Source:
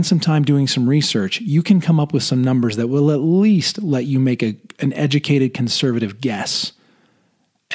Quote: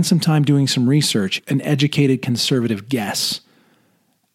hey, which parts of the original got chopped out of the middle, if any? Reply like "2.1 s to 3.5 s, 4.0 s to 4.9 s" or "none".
1.4 s to 4.7 s